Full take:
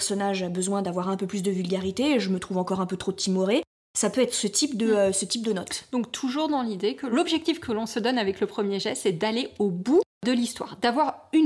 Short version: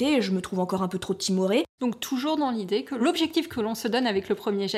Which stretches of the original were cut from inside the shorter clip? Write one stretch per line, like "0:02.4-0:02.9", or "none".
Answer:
0:03.8-0:05.9